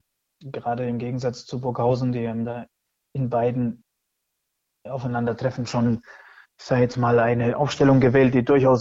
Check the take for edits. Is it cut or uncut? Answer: uncut